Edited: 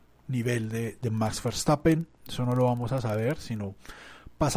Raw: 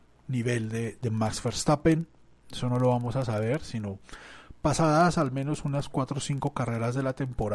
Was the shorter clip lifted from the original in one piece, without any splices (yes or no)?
no